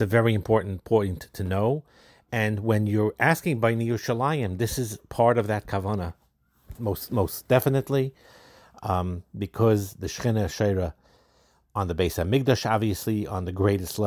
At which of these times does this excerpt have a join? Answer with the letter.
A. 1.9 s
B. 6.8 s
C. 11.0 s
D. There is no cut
B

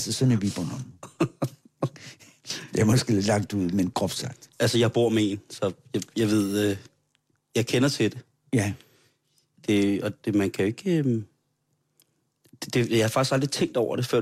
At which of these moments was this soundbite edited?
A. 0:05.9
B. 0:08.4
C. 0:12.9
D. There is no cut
D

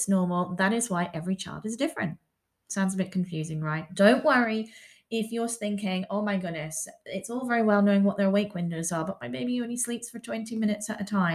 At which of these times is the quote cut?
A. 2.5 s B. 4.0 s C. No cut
B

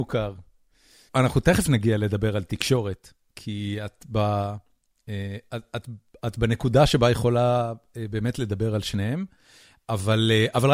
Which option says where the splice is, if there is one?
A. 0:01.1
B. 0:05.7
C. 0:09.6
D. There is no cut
A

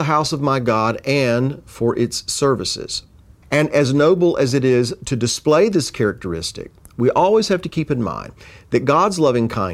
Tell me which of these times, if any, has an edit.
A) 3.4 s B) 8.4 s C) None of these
A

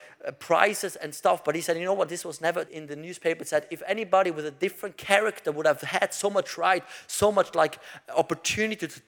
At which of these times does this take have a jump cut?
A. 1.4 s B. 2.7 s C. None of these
B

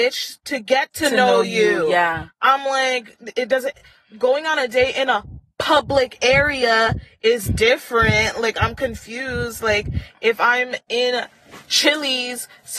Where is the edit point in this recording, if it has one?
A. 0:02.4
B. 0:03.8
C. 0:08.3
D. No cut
D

